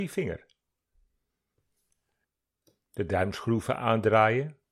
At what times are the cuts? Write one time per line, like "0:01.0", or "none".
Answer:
0:02.8